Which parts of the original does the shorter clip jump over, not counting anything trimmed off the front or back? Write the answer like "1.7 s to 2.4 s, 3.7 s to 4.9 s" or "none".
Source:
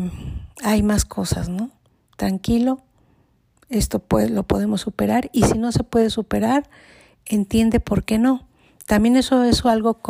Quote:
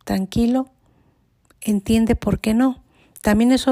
3.6 s to 7.2 s